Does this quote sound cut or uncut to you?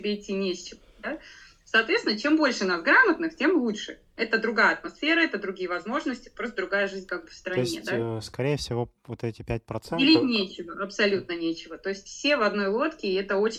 uncut